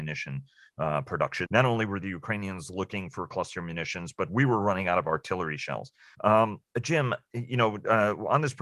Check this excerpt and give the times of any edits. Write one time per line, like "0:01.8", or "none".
0:01.5
0:06.1